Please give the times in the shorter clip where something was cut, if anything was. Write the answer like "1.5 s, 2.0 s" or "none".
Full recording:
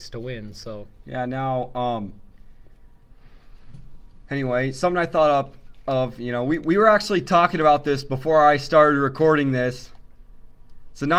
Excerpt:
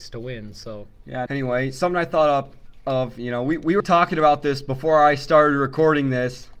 1.3 s, 3.8 s